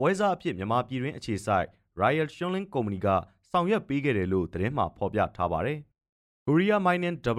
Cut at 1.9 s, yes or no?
no